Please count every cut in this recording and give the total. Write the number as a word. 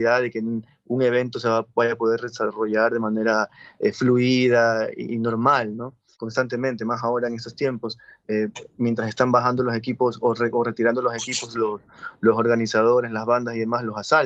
one